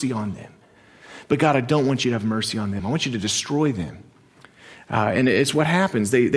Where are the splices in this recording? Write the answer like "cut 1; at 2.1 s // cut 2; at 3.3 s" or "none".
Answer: cut 1; at 2.8 s